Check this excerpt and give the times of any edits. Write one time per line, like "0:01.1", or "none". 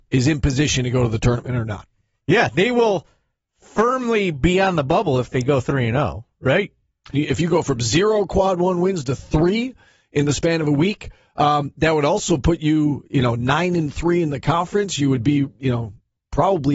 0:07.1

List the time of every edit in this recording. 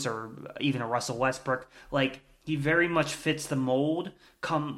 none

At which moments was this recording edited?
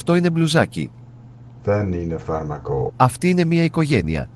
0:01.6
0:02.9

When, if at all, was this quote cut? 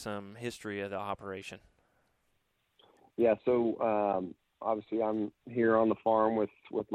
none

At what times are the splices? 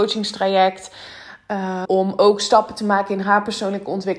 0:01.8

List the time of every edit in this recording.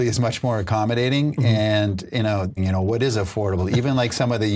0:02.6

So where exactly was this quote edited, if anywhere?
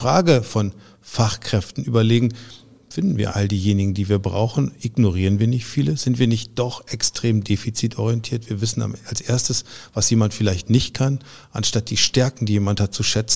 0:03.3

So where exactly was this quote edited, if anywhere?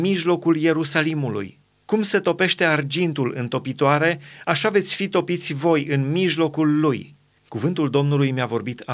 0:01.8
0:07.4

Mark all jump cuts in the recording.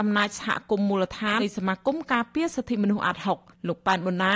0:01.4

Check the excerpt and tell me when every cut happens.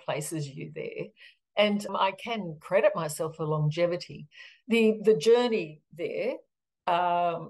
0:01.9

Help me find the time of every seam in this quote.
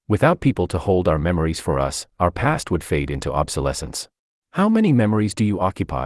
0:04.4

